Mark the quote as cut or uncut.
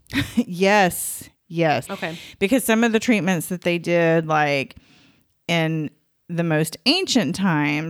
cut